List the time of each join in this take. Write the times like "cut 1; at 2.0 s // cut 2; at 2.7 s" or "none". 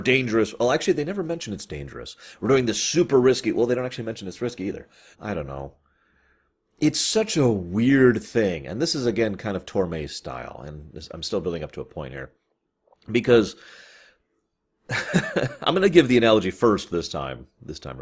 cut 1; at 5.1 s